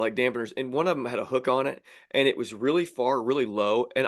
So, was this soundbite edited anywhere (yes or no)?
no